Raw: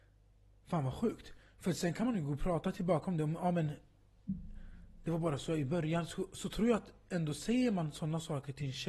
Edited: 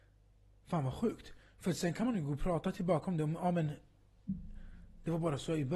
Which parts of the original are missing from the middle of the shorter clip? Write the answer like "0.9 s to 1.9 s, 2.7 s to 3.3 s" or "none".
none